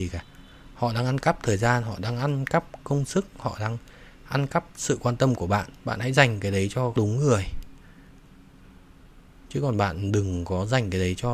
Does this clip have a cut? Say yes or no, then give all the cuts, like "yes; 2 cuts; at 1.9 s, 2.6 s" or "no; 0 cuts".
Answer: no; 0 cuts